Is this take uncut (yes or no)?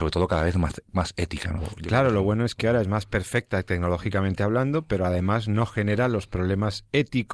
no